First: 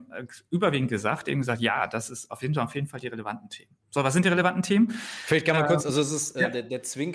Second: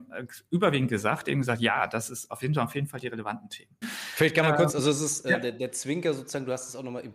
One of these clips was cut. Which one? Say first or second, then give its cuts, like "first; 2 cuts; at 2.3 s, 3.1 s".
second; 1 cut; at 3.8 s